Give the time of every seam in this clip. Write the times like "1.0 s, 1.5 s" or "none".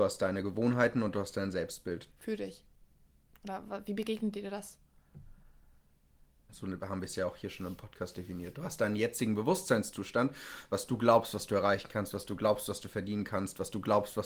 2.1 s, 6.5 s